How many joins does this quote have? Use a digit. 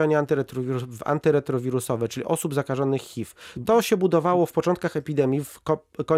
0